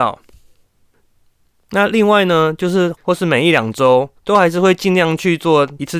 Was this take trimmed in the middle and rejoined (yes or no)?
yes